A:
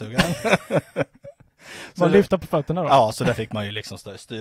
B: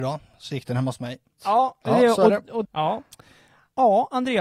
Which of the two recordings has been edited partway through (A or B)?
B